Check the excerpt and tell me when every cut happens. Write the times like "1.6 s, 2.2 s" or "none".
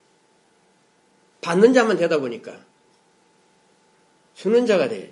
none